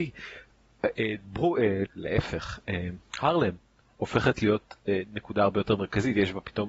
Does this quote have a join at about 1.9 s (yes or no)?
yes